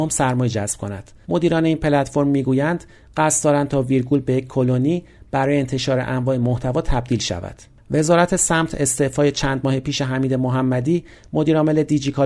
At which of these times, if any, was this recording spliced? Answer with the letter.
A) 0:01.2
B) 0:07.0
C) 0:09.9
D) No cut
A